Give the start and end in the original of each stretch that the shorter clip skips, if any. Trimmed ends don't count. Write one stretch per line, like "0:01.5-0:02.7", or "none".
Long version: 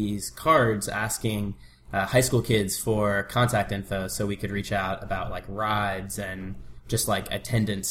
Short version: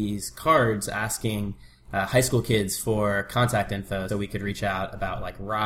0:04.1-0:04.2

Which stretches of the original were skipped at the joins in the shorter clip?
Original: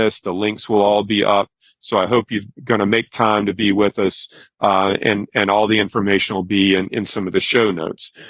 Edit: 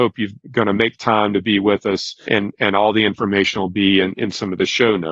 0:04.4-0:05.0

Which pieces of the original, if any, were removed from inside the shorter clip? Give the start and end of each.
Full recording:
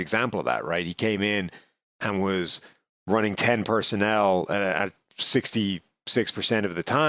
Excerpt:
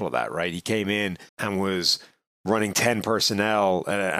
0:01.6-0:01.9

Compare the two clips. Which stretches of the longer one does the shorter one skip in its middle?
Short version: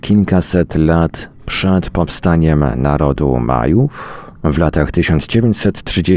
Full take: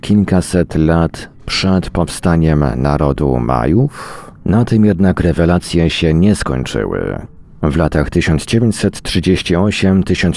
0:04.4-0:07.5

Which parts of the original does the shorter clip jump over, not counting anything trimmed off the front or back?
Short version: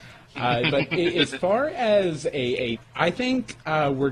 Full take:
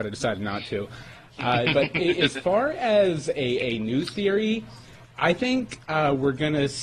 0:03.8-0:05.0

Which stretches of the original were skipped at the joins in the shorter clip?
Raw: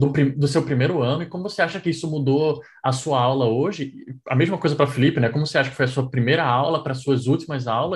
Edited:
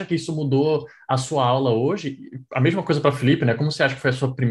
none

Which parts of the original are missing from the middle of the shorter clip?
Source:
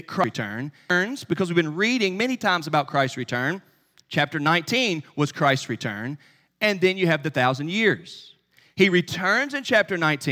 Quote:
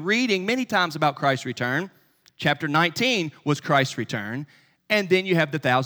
none

